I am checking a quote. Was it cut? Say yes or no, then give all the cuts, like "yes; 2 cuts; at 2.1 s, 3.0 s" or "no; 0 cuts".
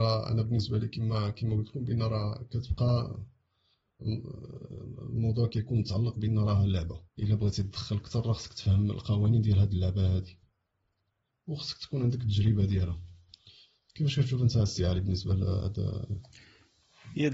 yes; 1 cut; at 7.1 s